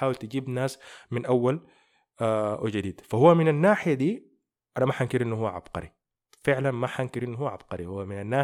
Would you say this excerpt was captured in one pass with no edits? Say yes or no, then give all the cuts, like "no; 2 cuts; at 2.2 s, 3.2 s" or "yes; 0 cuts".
yes; 0 cuts